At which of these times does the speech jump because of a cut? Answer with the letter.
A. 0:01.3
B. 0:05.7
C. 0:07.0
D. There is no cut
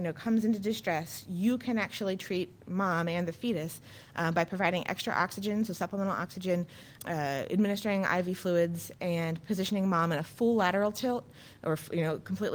C